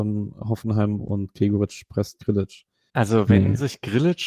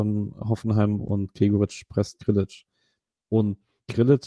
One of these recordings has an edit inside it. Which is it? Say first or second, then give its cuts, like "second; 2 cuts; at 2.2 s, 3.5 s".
first; 1 cut; at 2.9 s